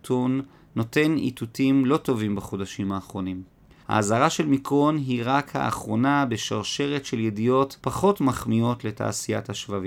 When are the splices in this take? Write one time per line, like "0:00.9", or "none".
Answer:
0:03.8
0:07.8